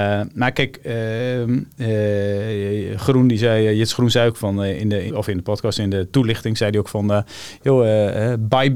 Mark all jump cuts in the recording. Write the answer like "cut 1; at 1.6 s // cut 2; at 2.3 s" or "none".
cut 1; at 5.1 s